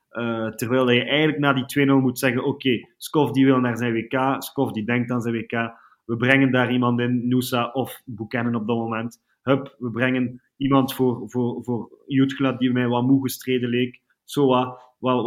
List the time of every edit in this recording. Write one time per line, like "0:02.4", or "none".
none